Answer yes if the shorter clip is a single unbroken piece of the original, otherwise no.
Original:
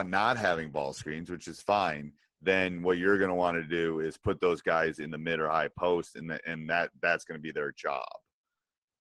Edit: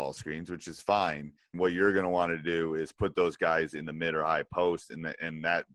no